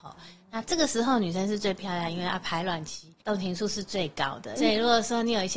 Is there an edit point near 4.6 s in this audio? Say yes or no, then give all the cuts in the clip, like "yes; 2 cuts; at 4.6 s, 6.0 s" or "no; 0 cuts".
yes; 2 cuts; at 3.2 s, 4.6 s